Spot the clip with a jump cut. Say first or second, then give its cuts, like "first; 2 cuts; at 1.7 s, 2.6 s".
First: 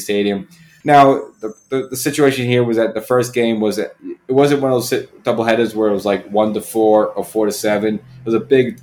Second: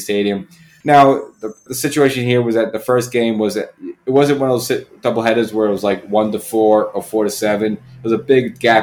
second; 1 cut; at 1.7 s